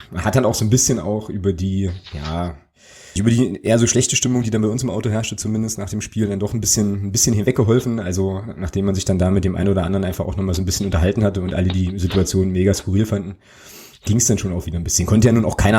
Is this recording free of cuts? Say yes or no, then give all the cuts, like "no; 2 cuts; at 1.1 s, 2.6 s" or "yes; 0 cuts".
no; 1 cut; at 3.2 s